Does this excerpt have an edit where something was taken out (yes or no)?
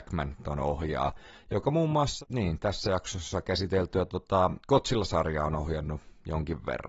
no